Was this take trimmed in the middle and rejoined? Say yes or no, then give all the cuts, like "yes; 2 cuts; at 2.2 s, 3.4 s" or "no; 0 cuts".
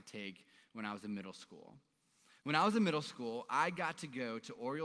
no; 0 cuts